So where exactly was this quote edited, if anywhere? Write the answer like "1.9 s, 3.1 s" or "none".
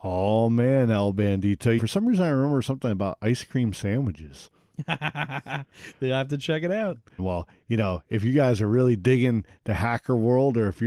1.8 s, 7.2 s